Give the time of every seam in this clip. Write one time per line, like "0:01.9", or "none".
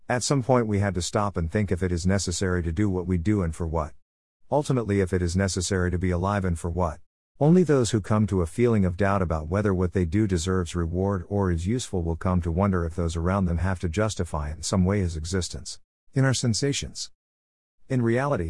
0:07.4
0:16.1